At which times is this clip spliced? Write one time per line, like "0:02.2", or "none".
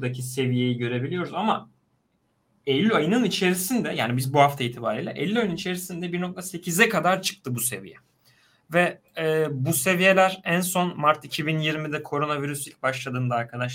none